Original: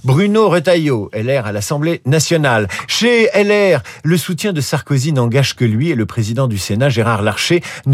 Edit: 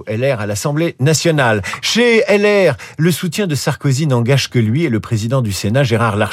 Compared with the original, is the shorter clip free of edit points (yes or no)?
yes